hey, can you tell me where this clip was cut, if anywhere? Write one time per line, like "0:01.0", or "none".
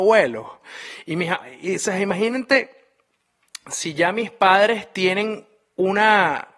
none